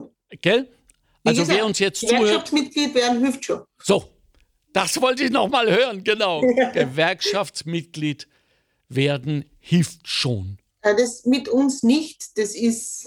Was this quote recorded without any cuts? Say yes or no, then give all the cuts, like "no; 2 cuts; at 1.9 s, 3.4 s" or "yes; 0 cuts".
no; 1 cut; at 10.7 s